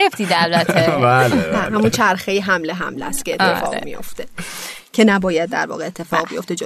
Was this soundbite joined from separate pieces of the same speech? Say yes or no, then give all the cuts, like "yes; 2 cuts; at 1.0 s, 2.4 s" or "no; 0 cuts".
no; 0 cuts